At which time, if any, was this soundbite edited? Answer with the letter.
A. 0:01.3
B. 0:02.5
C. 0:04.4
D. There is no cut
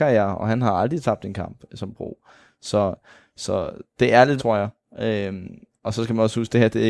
C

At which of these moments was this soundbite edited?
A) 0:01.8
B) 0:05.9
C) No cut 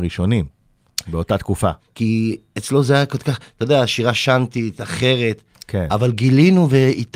A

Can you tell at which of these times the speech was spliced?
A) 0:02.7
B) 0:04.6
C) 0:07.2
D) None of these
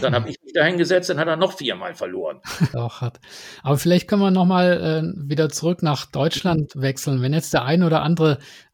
A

